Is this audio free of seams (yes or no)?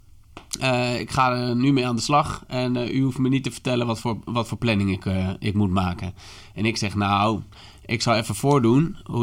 yes